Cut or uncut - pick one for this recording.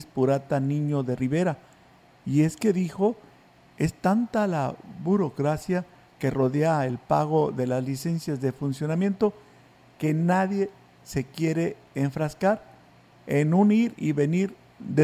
uncut